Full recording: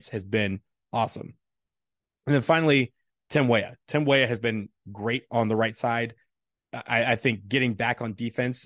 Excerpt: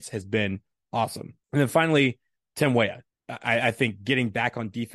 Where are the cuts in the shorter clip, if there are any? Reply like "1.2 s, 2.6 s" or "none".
1.4 s, 3.1 s